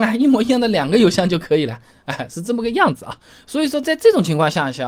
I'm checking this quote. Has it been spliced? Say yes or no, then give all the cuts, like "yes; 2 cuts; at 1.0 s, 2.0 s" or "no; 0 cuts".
no; 0 cuts